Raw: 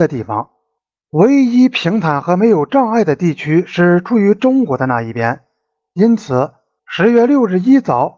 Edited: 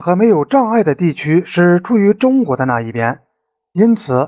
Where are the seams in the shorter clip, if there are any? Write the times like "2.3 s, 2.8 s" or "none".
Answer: none